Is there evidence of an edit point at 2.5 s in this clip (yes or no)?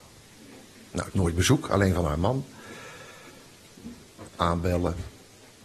no